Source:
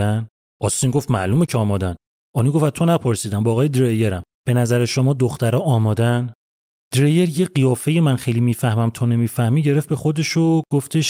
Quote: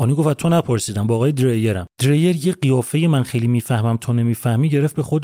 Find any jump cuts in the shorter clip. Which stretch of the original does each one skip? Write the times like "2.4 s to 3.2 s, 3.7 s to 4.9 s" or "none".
4.3 s to 6.8 s